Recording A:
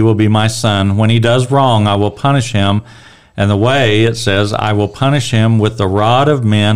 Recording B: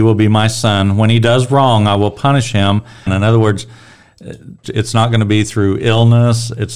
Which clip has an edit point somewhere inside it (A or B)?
B